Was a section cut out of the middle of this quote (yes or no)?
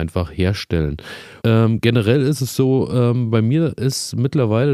yes